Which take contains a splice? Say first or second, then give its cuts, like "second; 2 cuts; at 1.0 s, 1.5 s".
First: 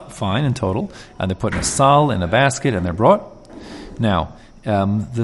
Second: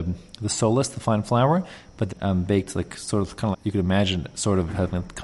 second; 2 cuts; at 2.1 s, 3.5 s